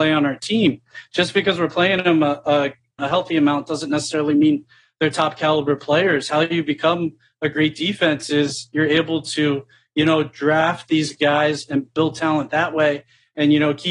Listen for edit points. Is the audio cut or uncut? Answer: cut